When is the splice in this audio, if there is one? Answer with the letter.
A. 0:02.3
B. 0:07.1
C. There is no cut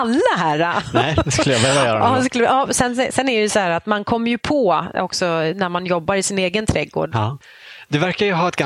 B